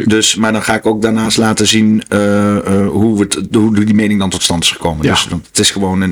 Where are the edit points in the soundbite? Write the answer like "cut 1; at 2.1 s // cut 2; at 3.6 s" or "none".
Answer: none